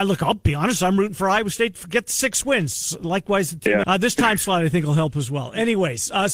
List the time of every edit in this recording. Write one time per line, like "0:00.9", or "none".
0:03.8